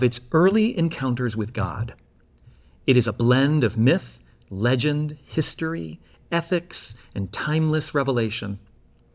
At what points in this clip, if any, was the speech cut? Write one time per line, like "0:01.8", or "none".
none